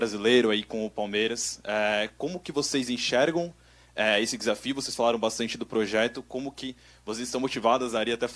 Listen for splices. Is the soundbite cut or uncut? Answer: uncut